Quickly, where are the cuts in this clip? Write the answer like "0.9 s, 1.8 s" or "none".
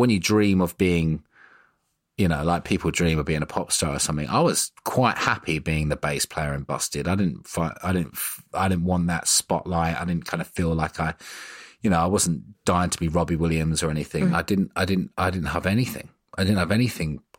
14.3 s